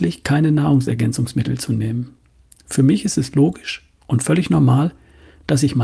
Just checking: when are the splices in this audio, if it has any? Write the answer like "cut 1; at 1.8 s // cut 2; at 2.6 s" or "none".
none